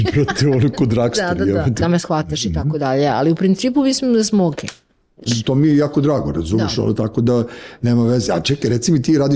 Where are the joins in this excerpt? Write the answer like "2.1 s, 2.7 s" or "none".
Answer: 1.8 s, 5.3 s